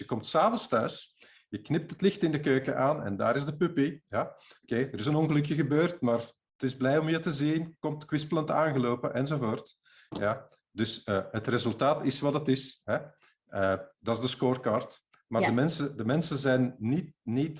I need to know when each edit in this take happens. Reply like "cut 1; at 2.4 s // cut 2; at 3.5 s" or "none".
none